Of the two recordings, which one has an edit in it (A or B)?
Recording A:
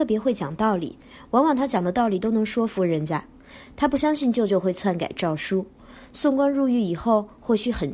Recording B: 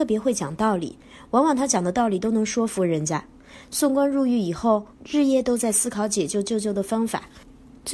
B